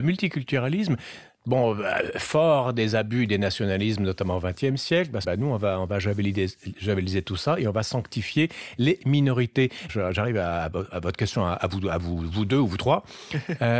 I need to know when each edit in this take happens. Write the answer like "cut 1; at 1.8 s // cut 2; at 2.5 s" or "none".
cut 1; at 5.2 s // cut 2; at 9.9 s